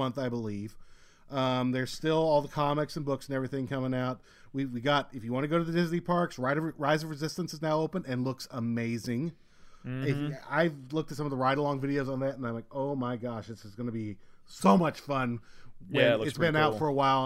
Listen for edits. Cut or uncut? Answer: uncut